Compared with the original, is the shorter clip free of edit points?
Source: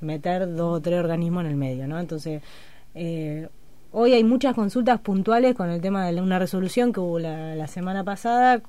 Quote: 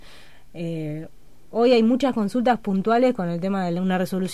yes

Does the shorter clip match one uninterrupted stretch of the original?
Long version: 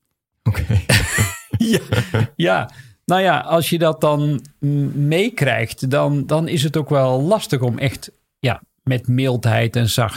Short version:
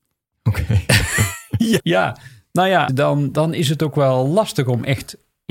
no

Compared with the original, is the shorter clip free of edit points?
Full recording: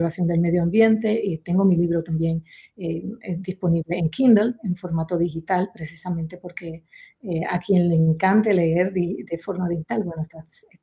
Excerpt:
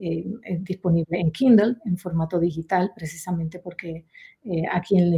yes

